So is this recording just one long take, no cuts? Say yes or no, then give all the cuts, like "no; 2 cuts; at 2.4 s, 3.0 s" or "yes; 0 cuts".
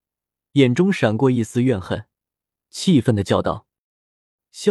no; 1 cut; at 2.5 s